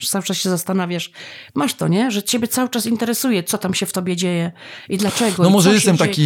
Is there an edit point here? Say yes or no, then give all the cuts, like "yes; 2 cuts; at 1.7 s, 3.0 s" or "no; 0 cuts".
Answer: no; 0 cuts